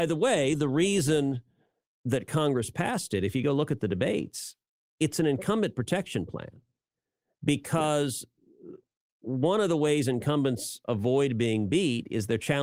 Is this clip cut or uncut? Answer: uncut